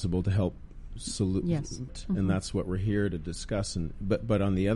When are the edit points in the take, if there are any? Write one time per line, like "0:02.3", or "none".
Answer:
0:01.9